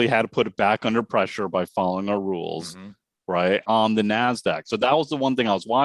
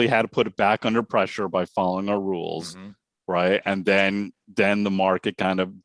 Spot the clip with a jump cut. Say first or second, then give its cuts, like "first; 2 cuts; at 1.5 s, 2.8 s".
first; 1 cut; at 3.6 s